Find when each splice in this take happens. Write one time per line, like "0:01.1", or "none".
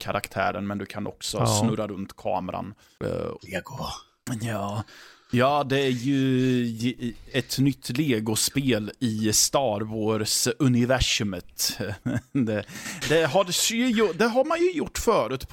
0:03.4
0:13.0